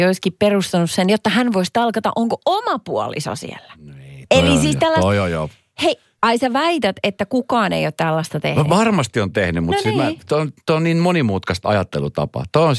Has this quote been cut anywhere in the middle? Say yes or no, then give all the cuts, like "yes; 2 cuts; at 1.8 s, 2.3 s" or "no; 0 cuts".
yes; 1 cut; at 6.1 s